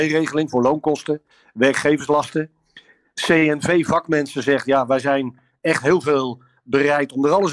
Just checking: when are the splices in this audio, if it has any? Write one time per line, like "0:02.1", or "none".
none